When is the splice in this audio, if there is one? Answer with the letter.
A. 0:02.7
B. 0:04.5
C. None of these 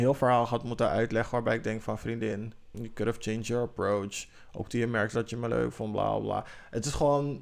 A